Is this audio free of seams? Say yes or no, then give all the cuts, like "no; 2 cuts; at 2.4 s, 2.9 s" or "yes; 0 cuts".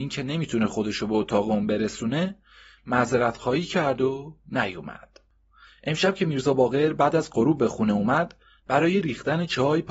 no; 2 cuts; at 5.7 s, 8.6 s